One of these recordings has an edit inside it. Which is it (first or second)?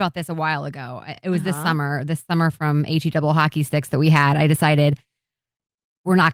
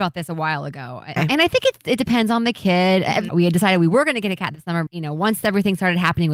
second